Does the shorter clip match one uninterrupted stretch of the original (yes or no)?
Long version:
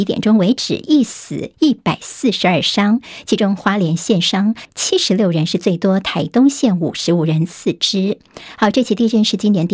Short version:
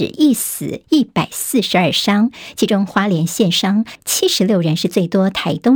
yes